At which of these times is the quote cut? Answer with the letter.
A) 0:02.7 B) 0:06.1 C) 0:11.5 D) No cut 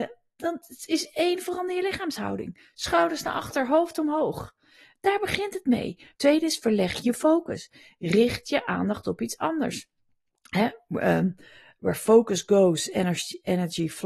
B